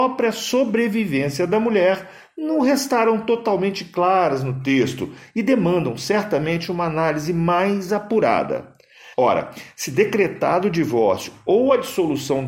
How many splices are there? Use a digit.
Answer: 1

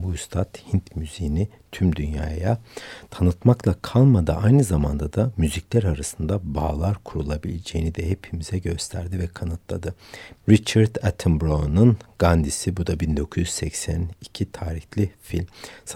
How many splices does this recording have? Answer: 1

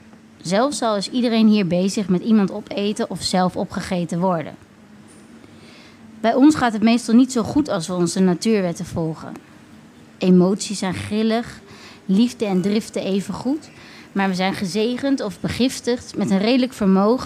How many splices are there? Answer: 0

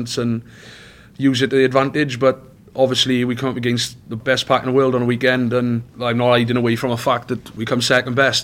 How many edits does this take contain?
1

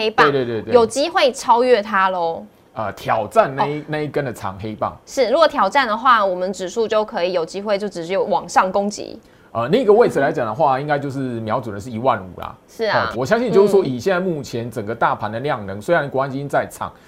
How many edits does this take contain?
1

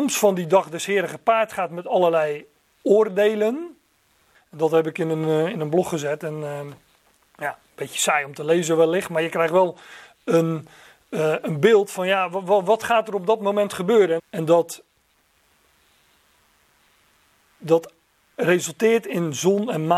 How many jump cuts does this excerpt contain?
2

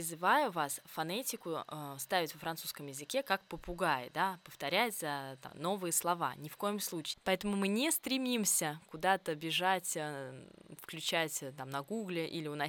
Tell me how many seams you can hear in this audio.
2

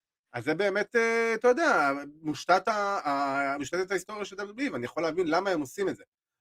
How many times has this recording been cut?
0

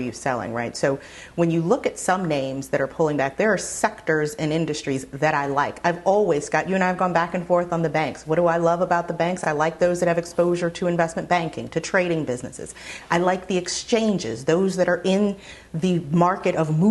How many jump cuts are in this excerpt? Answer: 0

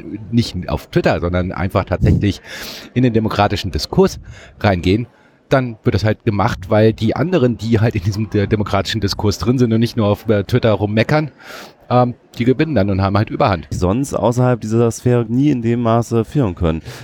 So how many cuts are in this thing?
2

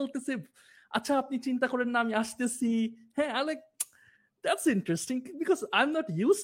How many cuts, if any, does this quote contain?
0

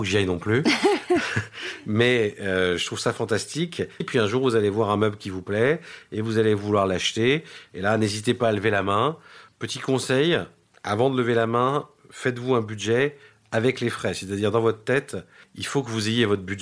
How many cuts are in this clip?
1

